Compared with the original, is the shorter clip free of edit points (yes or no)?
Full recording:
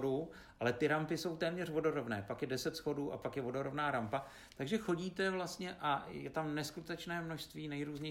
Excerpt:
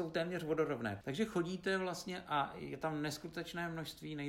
no